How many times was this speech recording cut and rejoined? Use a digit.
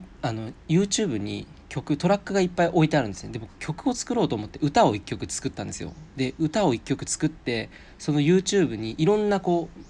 0